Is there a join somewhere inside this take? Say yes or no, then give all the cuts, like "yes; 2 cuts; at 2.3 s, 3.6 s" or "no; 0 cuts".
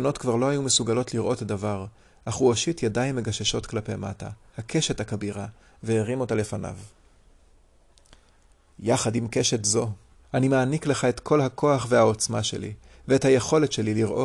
yes; 2 cuts; at 4.5 s, 10.2 s